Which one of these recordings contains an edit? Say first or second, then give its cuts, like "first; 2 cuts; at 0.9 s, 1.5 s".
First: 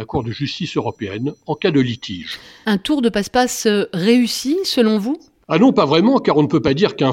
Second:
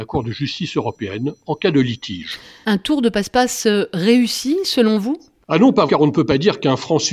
second; 1 cut; at 5.9 s